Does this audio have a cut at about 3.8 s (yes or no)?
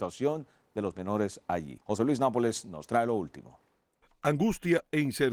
no